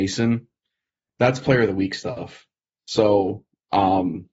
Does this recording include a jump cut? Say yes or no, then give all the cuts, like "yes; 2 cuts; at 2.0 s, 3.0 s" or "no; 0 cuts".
no; 0 cuts